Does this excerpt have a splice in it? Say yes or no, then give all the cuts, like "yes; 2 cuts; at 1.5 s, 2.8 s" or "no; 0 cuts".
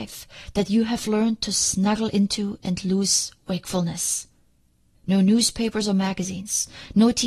yes; 1 cut; at 4.9 s